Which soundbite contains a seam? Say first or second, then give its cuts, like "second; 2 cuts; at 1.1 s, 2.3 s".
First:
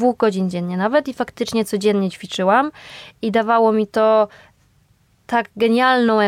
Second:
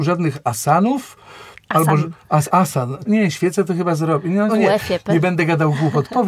second; 2 cuts; at 3.1 s, 4.5 s